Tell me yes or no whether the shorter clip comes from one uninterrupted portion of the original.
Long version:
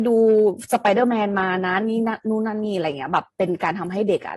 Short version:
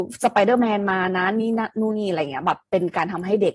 no